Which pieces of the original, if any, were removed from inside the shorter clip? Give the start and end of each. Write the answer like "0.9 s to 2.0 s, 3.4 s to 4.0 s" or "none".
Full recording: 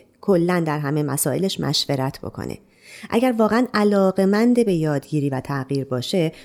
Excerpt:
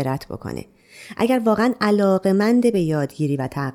none